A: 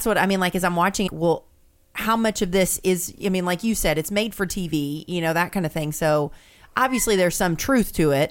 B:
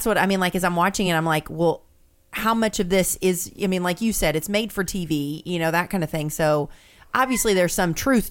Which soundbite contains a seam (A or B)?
A